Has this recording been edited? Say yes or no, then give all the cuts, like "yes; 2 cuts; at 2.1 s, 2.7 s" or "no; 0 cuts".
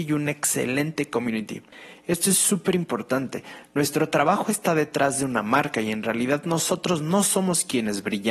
yes; 1 cut; at 2.0 s